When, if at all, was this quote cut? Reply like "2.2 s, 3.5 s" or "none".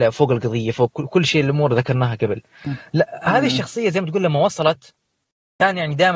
none